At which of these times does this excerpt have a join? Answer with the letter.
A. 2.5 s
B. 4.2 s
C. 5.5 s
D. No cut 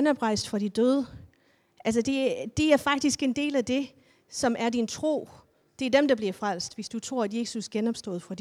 D